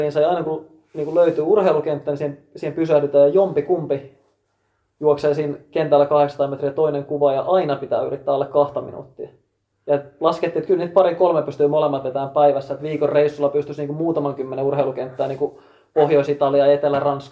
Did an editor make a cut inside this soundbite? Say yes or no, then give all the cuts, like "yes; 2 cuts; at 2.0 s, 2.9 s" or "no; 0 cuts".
no; 0 cuts